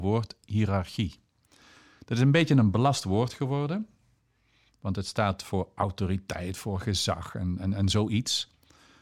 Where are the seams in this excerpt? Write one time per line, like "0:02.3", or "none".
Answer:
none